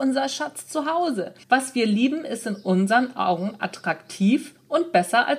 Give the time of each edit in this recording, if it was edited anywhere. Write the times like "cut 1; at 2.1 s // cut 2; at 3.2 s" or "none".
cut 1; at 1.4 s

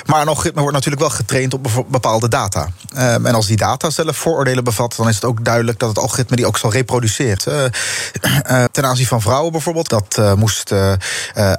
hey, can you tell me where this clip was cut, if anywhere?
cut 1; at 7.4 s // cut 2; at 8.7 s // cut 3; at 9.9 s

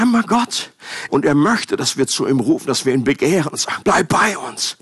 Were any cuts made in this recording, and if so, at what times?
cut 1; at 1.1 s // cut 2; at 3.8 s

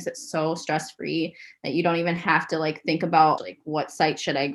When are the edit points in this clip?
cut 1; at 3.4 s

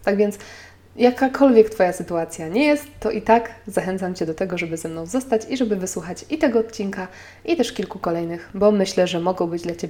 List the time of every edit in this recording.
none

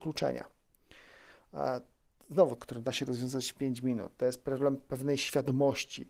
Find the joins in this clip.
cut 1; at 2.6 s

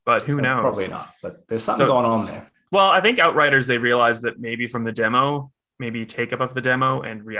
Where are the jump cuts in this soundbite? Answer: cut 1; at 2.7 s // cut 2; at 5.7 s

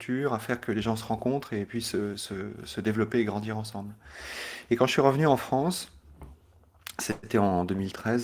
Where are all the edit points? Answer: none

